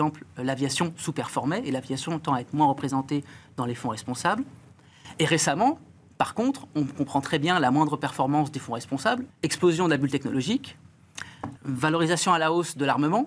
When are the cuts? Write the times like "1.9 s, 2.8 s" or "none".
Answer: 9.3 s, 11.6 s